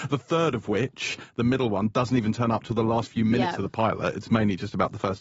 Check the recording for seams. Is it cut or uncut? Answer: uncut